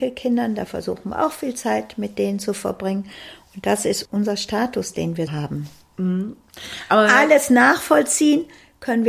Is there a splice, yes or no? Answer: yes